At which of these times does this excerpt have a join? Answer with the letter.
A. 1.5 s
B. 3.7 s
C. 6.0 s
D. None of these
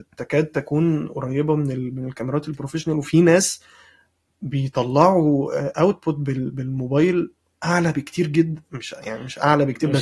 D